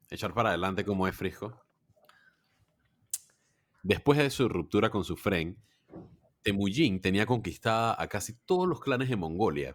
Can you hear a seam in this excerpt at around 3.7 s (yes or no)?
yes